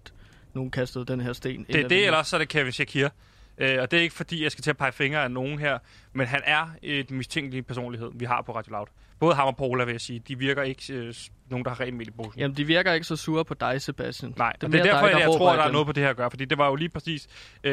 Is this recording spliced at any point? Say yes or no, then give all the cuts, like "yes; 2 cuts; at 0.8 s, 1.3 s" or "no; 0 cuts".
no; 0 cuts